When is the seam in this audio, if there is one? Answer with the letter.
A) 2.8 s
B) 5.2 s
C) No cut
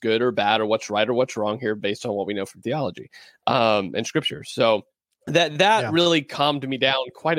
C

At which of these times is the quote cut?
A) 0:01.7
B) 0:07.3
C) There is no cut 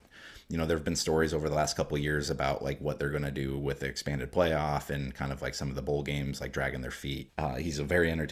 B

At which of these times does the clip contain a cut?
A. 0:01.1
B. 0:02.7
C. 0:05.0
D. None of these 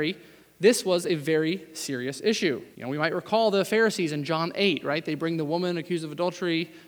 B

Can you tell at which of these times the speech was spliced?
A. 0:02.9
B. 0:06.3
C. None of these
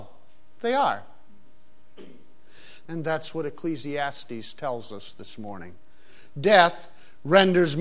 A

